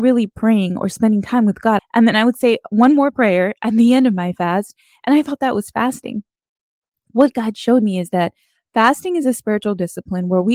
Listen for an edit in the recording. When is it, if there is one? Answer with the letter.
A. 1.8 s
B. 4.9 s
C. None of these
A